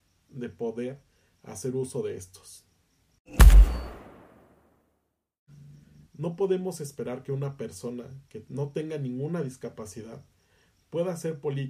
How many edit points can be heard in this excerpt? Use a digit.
1